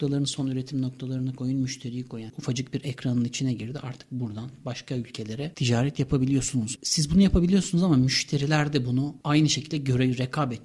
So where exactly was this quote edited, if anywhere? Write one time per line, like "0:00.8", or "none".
0:02.3